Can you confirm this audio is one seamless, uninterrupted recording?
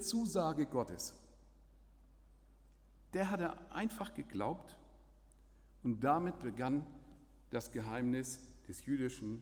yes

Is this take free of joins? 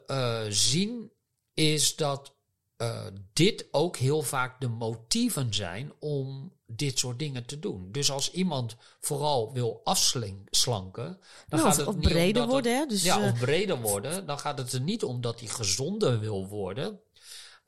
yes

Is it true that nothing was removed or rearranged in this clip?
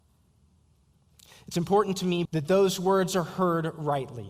no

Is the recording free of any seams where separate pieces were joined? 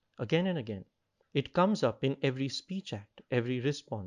no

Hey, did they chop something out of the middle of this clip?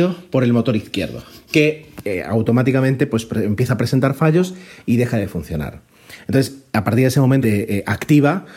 yes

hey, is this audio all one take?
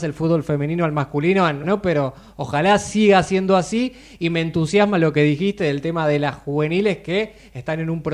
no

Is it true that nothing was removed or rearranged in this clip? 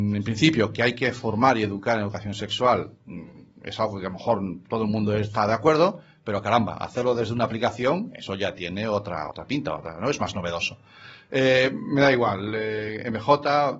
yes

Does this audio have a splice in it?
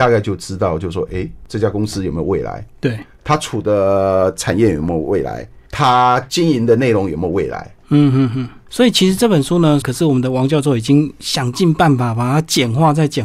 yes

